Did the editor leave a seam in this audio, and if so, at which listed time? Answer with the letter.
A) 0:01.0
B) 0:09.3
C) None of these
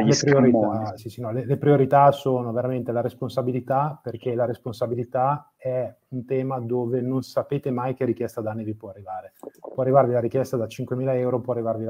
A